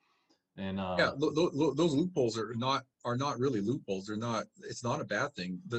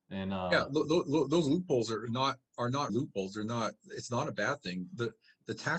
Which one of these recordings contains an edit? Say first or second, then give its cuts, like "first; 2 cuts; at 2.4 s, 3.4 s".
second; 1 cut; at 2.9 s